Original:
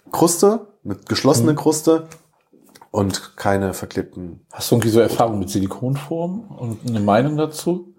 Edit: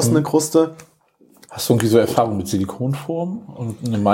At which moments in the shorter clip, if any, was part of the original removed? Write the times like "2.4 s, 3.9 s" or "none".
1.4 s